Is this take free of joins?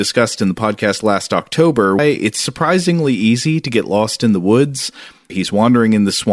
no; 2 cuts; at 2.0 s, 5.3 s

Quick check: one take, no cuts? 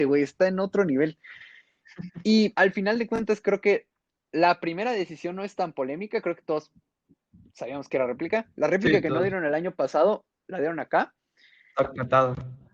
no; 1 cut; at 2.5 s

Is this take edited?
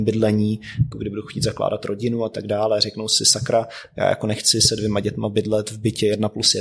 yes; 1 cut; at 0.9 s

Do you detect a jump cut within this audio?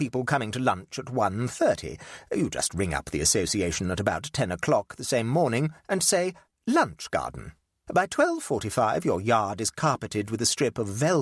yes; 1 cut; at 7.9 s

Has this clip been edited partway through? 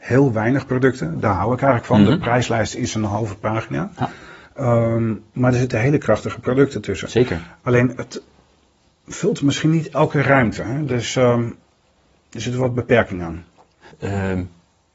yes; 1 cut; at 13.9 s

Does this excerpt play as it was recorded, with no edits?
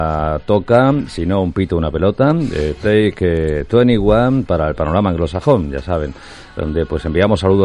yes; 0 cuts

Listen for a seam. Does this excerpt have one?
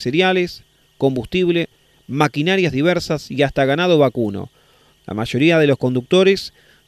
yes; 1 cut; at 5.0 s

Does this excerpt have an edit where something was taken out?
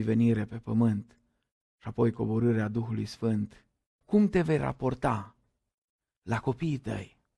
yes; 1 cut; at 4.0 s

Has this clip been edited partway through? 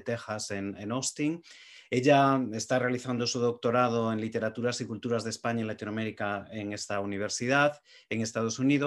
no; 0 cuts

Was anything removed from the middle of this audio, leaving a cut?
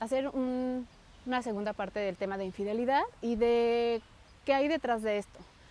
yes; 1 cut; at 4.4 s

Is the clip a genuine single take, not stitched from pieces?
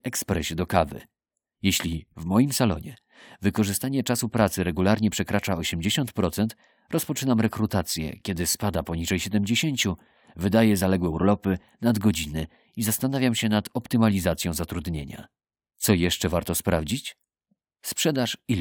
yes; 0 cuts

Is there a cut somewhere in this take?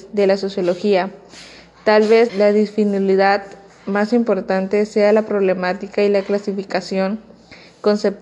yes; 1 cut; at 2.3 s

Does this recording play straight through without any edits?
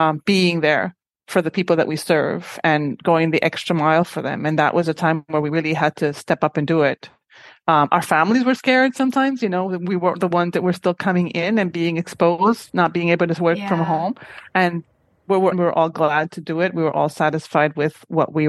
no; 1 cut; at 15.5 s

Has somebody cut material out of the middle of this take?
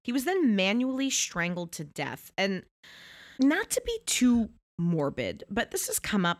yes; 1 cut; at 3.3 s

